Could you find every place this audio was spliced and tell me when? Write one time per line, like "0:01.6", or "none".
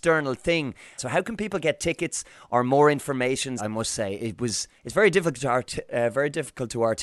0:01.0
0:03.6
0:04.8